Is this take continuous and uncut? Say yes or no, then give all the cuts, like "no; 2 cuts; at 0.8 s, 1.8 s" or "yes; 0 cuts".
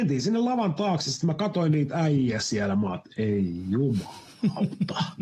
yes; 0 cuts